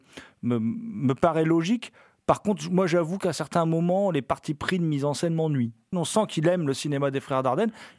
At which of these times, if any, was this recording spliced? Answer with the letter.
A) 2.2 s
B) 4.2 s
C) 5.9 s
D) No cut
C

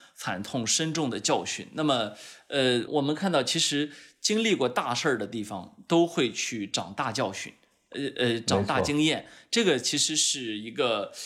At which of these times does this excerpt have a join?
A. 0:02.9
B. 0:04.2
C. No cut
A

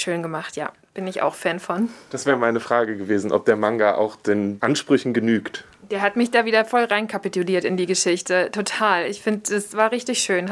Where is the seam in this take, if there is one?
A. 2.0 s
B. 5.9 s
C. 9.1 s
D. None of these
D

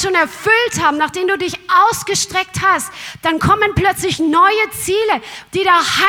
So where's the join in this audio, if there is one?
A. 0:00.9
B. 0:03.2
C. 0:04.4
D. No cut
D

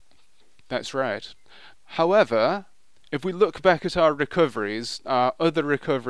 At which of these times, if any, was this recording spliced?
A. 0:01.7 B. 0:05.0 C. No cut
A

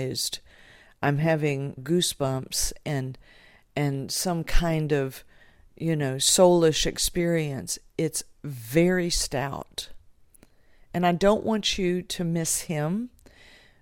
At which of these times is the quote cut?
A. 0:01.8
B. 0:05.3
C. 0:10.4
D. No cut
A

